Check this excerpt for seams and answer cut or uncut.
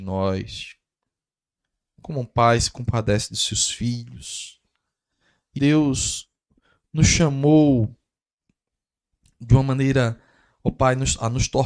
cut